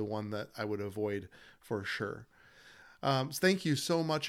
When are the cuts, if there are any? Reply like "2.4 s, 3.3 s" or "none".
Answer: none